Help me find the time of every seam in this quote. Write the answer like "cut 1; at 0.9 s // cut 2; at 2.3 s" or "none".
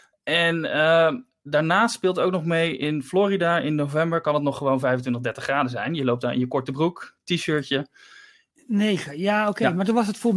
cut 1; at 8.5 s